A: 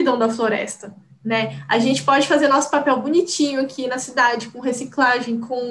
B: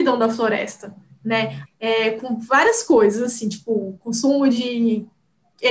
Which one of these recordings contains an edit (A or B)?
B